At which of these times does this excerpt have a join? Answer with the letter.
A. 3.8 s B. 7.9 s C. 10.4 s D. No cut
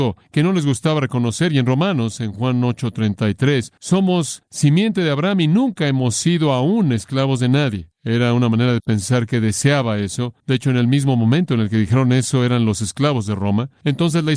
A